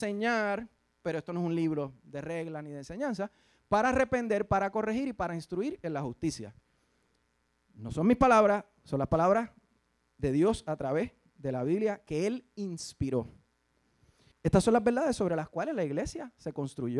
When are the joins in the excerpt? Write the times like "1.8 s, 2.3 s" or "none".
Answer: 14.3 s